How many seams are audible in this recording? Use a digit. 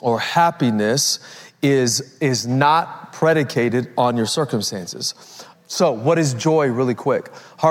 1